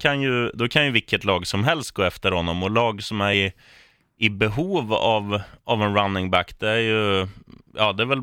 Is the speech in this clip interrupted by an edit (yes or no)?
no